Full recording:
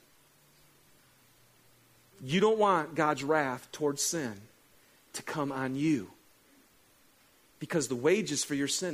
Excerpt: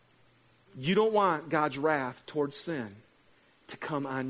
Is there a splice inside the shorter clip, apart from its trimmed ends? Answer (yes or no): no